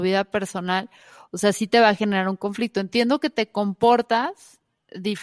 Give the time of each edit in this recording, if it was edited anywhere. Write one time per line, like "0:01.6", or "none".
none